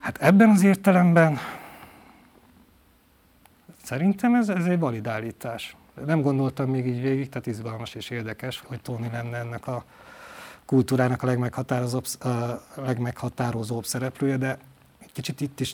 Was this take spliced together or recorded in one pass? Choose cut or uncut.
cut